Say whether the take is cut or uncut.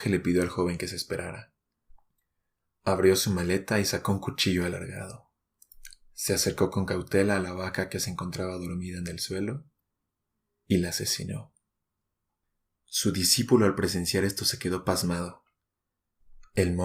uncut